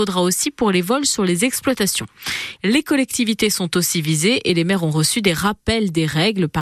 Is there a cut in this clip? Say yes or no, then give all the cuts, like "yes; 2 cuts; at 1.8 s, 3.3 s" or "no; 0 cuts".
yes; 1 cut; at 2.6 s